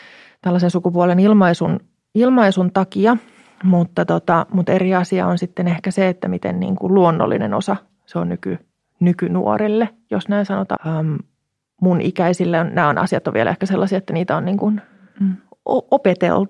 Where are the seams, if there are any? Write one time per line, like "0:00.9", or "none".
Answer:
0:10.8